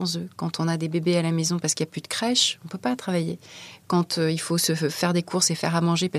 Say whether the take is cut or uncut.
uncut